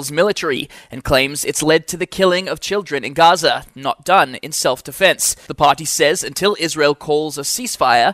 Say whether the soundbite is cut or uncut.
uncut